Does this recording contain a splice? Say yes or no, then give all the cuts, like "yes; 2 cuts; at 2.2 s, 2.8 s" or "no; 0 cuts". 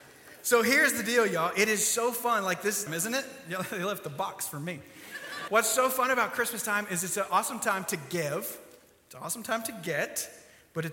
yes; 2 cuts; at 2.9 s, 5.5 s